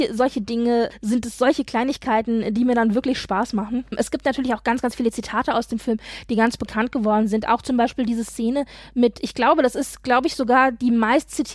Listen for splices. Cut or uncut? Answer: uncut